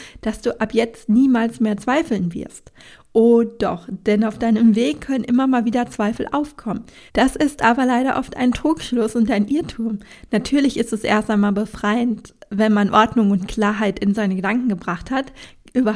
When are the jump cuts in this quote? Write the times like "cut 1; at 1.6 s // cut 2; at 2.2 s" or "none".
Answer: cut 1; at 7.1 s